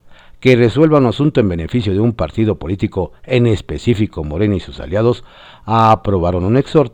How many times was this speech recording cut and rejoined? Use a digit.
0